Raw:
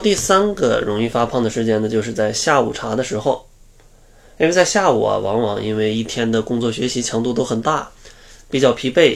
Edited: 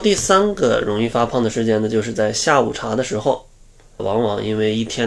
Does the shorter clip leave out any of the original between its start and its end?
yes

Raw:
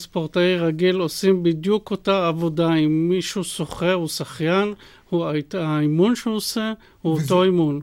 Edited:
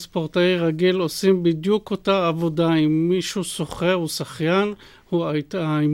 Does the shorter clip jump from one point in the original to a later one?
no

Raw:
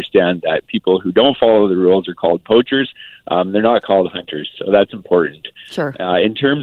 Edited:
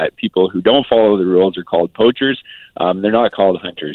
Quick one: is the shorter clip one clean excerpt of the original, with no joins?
yes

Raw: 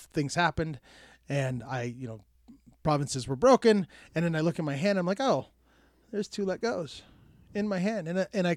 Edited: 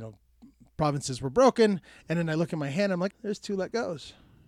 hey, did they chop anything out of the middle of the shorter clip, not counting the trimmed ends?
yes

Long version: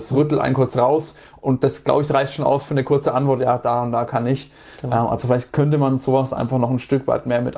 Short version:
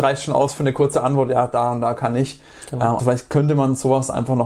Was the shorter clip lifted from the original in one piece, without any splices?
no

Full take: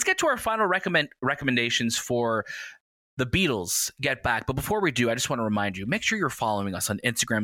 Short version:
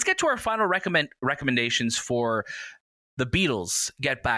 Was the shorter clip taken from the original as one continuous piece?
yes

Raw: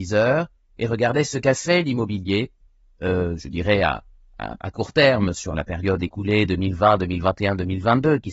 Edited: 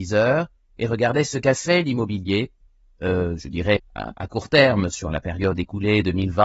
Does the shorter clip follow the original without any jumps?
no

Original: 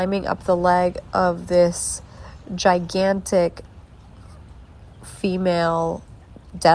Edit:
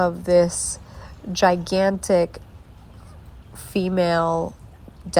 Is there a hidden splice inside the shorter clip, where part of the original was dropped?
yes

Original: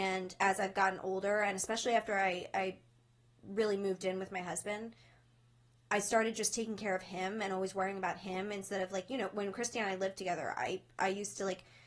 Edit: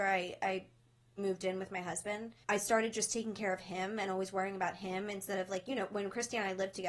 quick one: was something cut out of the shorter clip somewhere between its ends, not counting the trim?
yes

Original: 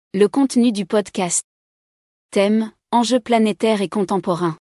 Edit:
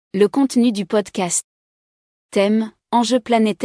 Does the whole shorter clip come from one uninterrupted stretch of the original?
yes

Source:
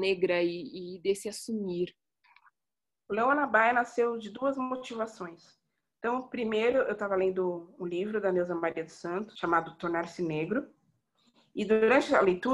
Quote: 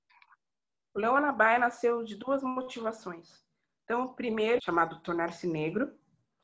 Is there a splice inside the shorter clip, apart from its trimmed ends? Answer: yes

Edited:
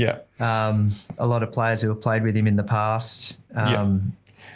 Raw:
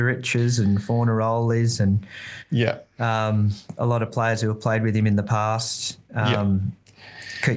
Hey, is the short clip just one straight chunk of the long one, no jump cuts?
yes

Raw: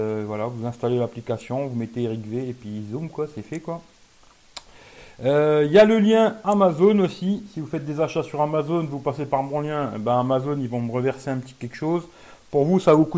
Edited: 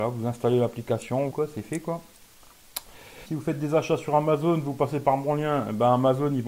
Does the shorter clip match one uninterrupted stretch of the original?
no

